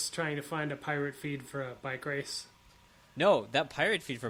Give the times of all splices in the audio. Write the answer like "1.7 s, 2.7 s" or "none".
none